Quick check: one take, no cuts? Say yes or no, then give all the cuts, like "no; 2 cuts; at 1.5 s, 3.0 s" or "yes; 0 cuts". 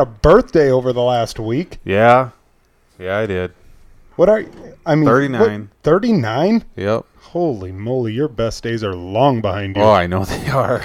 yes; 0 cuts